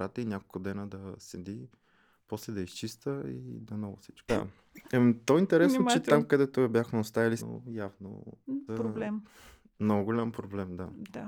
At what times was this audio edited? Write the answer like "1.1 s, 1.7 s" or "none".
4.3 s, 7.4 s, 8.7 s